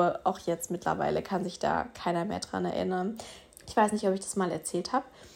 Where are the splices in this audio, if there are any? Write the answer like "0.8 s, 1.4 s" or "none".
3.5 s